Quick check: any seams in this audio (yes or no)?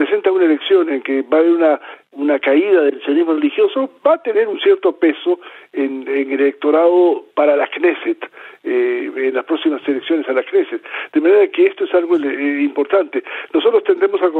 no